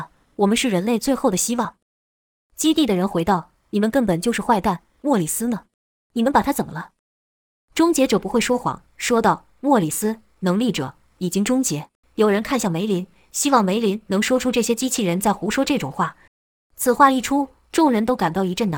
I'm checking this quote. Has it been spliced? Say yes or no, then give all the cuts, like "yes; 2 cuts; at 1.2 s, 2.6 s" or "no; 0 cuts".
yes; 2 cuts; at 12.0 s, 16.3 s